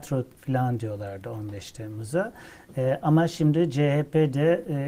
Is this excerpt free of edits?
yes; 0 cuts

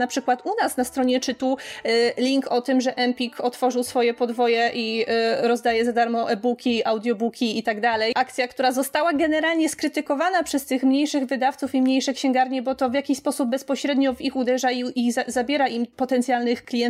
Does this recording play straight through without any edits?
yes; 0 cuts

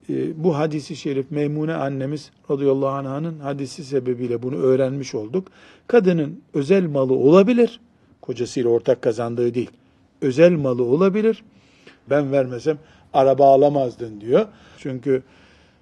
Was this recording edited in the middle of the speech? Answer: yes; 2 cuts; at 12.1 s, 14.8 s

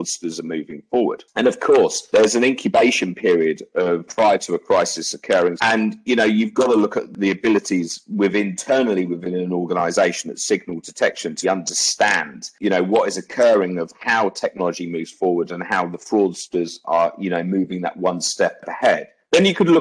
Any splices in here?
yes; 2 cuts; at 5.6 s, 11.4 s

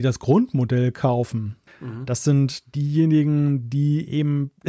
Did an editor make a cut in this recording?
yes; 1 cut; at 1.7 s

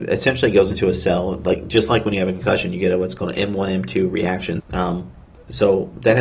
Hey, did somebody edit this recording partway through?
yes; 1 cut; at 4.6 s

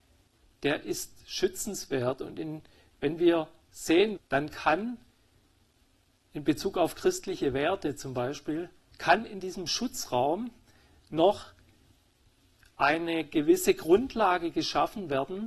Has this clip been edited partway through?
yes; 1 cut; at 4.2 s

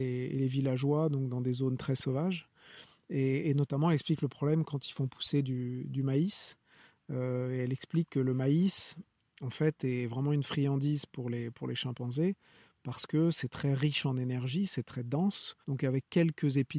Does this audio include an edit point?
yes; 1 cut; at 15.6 s

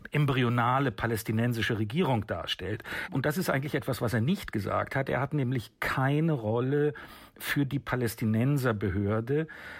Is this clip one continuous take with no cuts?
no; 1 cut; at 3.1 s

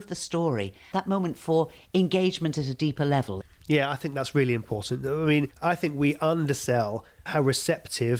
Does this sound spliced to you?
no; 0 cuts

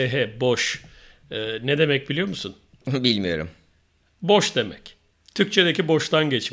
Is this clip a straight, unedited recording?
yes; 0 cuts

